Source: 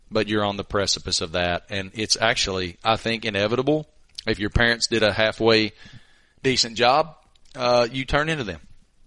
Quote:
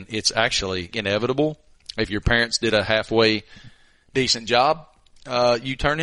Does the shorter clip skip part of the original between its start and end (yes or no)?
yes